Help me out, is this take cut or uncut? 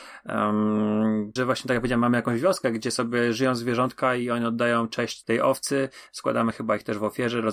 cut